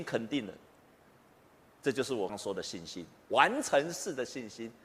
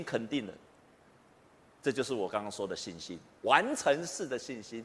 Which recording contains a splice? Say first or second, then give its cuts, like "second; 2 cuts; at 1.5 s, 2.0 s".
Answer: first; 1 cut; at 2.3 s